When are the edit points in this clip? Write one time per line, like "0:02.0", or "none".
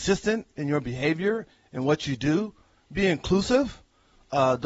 none